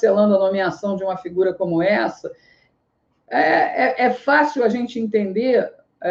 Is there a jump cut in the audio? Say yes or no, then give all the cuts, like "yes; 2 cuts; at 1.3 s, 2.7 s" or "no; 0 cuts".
no; 0 cuts